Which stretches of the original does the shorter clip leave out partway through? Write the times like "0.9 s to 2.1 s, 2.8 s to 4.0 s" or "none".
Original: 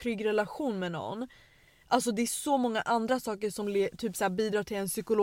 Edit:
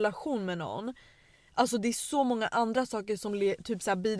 none